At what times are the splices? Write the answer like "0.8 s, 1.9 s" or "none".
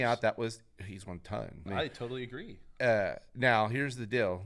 1.7 s